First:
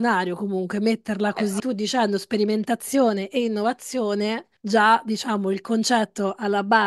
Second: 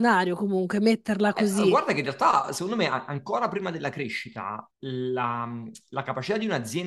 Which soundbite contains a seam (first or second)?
first